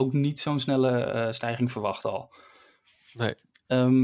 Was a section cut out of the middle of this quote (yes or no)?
no